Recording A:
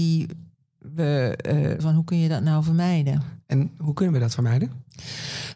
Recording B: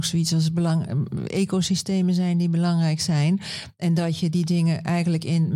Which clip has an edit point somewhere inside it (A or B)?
A